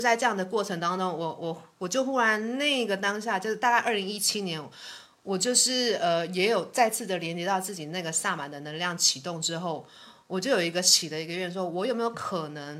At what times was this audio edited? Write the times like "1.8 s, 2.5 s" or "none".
none